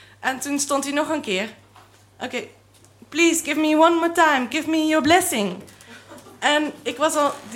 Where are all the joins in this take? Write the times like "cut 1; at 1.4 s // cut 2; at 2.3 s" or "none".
none